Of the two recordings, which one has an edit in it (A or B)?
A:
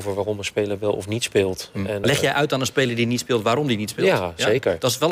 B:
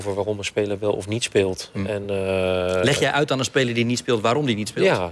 A